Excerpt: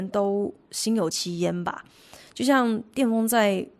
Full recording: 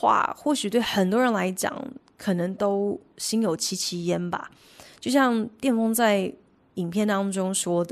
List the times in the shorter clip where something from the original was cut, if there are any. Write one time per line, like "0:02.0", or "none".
0:01.1